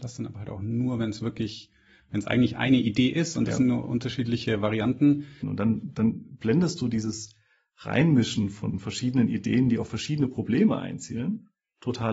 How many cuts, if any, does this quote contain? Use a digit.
1